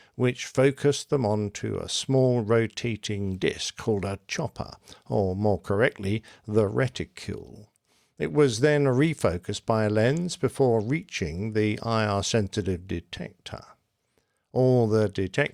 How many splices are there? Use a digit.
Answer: 0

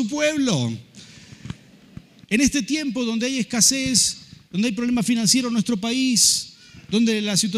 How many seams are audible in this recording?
1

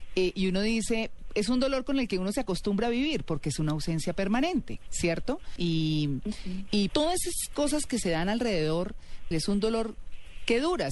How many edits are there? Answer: 3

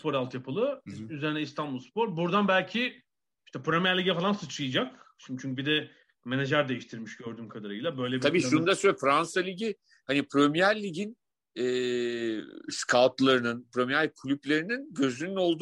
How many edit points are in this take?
0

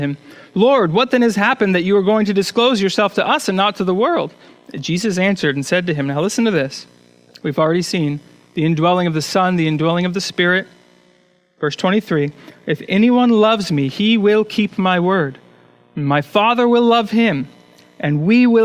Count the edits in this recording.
0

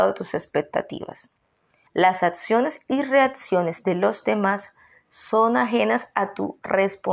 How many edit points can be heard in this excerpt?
1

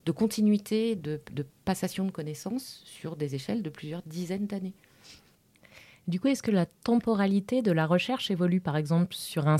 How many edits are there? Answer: 0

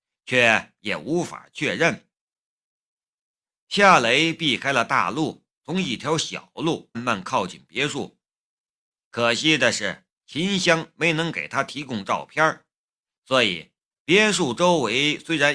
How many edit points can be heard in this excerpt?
3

